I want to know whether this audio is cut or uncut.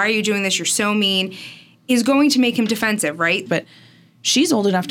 cut